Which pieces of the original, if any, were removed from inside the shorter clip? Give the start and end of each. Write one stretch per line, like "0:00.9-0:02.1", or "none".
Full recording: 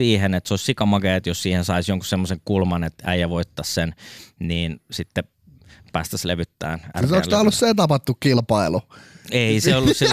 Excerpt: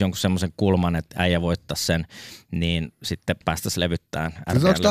0:05.3-0:05.9